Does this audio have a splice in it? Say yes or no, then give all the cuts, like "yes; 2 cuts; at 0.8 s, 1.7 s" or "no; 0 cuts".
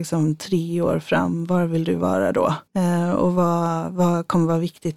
yes; 1 cut; at 2.7 s